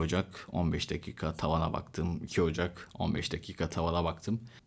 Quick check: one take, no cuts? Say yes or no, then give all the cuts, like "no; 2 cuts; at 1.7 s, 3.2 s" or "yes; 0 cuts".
yes; 0 cuts